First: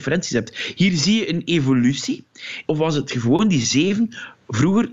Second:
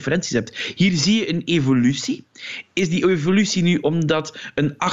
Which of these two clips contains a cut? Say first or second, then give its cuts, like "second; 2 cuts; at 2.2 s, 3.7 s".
first; 1 cut; at 2.6 s